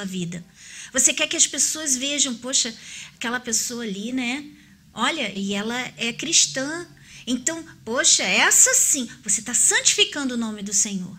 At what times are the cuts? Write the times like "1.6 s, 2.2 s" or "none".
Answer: 5.4 s